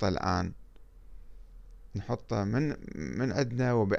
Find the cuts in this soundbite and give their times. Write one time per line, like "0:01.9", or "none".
none